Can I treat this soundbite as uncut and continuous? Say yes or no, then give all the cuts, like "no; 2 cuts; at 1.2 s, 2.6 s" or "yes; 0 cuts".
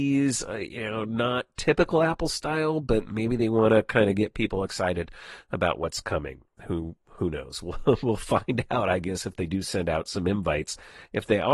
yes; 0 cuts